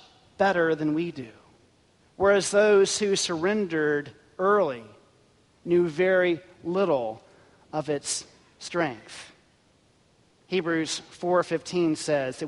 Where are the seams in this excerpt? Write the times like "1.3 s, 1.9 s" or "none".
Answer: 2.0 s